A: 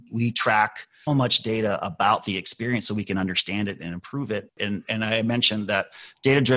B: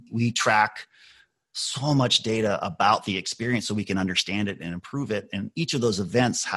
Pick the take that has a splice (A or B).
A